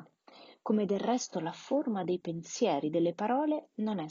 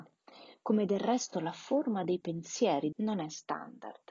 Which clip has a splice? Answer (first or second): second